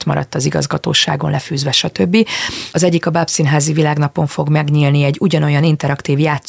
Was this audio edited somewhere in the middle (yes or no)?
yes